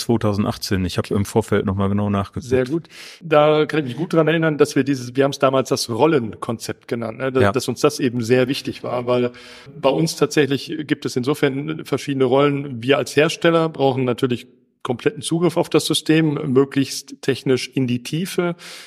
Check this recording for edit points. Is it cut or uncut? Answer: uncut